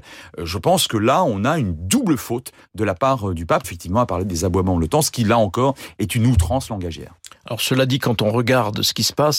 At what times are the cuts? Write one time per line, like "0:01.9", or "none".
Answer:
0:03.6